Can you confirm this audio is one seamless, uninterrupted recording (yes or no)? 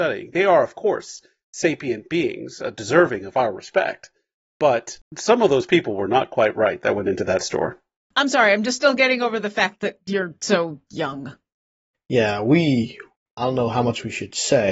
yes